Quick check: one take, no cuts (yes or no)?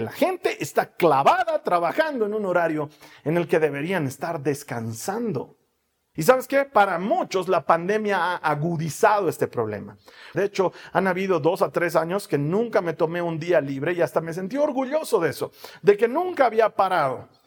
no